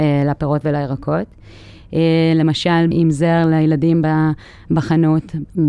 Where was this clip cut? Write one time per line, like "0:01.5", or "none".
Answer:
0:02.9